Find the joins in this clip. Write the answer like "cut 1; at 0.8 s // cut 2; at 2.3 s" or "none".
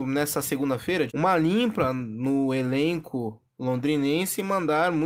cut 1; at 1.1 s